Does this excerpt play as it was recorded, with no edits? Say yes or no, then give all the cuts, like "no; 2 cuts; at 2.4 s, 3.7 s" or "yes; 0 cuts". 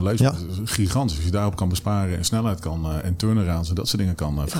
yes; 0 cuts